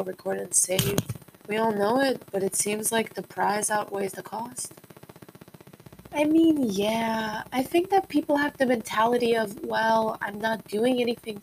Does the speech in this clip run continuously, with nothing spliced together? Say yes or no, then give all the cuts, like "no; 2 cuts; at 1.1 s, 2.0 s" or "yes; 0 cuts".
no; 1 cut; at 1.4 s